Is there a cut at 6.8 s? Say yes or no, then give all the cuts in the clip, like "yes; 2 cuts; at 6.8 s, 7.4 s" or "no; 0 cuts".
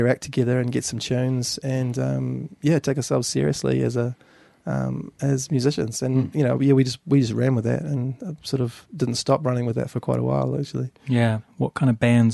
no; 1 cut; at 11.4 s